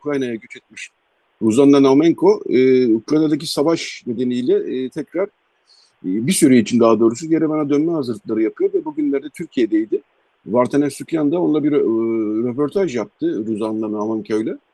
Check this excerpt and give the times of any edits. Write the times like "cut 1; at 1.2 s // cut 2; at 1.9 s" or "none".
none